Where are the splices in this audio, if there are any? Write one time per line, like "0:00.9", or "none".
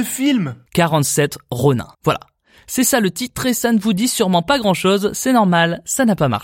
0:01.9